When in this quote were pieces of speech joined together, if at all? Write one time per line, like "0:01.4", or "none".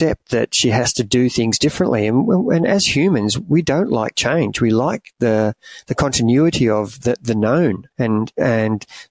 0:07.9